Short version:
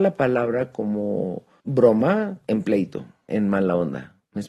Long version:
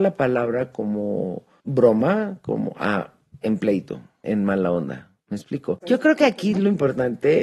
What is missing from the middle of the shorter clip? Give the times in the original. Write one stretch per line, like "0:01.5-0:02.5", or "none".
0:02.4-0:03.4

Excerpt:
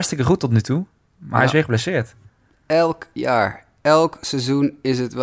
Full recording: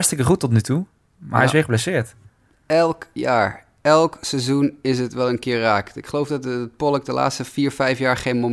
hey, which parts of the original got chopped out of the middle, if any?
none

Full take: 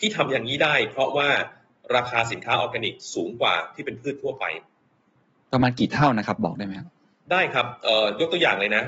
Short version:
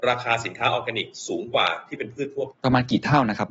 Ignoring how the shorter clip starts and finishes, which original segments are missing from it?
0:04.4-0:05.4

